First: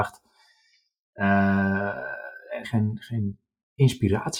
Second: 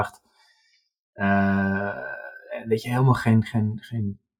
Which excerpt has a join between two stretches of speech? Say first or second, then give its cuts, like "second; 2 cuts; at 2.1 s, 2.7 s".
first; 1 cut; at 2.6 s